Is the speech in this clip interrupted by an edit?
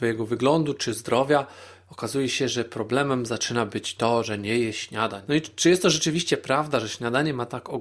yes; 1 cut; at 5.2 s

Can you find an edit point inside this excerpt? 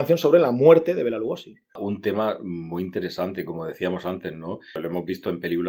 no; 0 cuts

